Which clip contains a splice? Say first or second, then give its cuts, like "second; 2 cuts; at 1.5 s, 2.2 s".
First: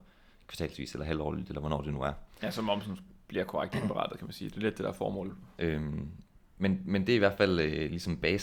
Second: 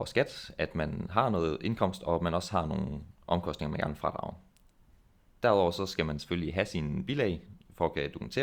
first; 1 cut; at 5.6 s